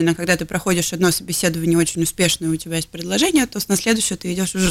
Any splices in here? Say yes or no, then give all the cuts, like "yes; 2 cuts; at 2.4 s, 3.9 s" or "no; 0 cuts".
no; 0 cuts